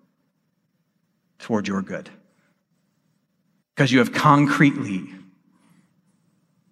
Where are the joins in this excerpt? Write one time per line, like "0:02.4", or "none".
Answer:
0:03.6